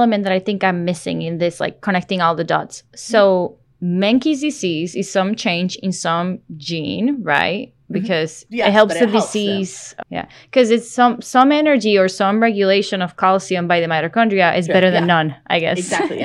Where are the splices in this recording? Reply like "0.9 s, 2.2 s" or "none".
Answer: 8.5 s, 10.0 s